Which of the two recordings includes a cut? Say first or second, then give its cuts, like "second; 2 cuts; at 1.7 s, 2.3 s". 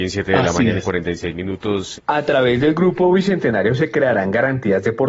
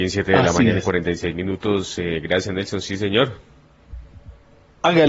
first; 1 cut; at 2.0 s